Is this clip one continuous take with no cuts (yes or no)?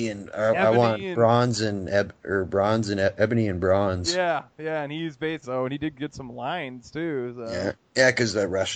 no